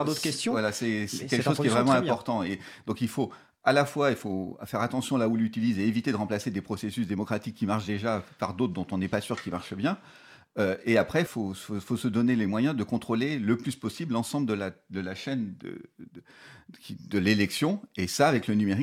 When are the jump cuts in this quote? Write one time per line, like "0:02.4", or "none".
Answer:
0:11.3